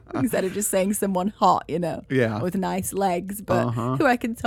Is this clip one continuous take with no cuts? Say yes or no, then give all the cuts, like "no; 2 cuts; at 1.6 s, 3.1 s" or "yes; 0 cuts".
yes; 0 cuts